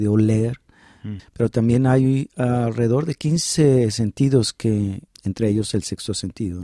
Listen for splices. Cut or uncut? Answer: cut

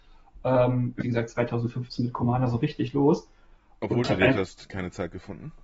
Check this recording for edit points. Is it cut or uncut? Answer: cut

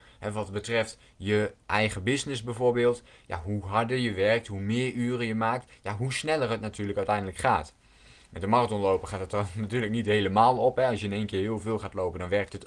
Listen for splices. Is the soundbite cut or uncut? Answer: uncut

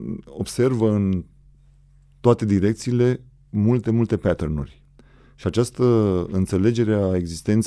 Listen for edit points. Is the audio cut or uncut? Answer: uncut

